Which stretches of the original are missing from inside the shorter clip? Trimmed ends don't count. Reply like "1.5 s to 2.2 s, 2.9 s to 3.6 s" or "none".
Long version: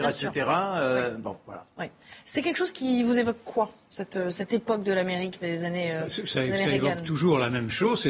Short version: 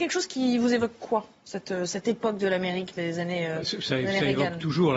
none